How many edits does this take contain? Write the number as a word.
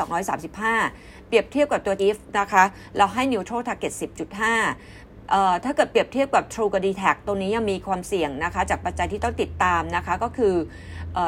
one